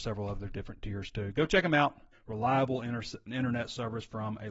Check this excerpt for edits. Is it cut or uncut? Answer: cut